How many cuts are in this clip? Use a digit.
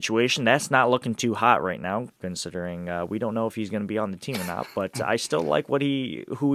0